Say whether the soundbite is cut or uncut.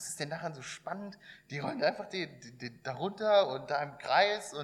uncut